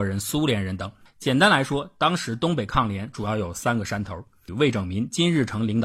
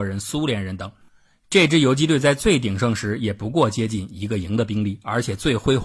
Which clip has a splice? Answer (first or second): first